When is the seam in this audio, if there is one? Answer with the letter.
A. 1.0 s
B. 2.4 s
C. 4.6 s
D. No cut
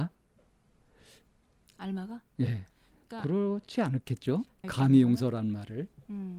C